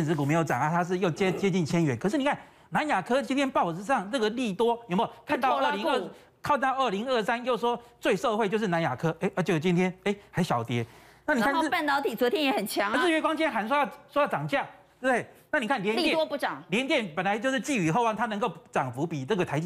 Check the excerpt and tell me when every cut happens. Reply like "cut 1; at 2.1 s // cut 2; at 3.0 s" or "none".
none